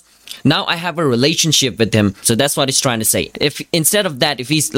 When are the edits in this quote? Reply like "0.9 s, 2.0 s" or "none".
2.2 s, 3.3 s